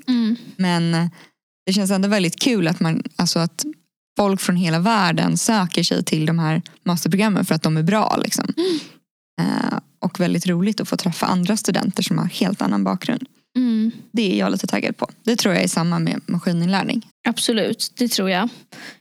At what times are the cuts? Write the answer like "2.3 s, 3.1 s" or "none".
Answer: 17.1 s